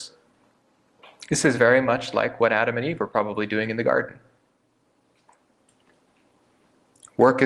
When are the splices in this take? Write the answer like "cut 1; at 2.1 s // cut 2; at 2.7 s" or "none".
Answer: none